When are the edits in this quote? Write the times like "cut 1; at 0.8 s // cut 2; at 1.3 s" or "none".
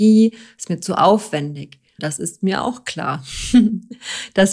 cut 1; at 2.0 s